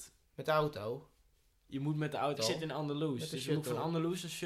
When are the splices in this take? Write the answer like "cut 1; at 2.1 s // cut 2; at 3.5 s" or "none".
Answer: cut 1; at 2.4 s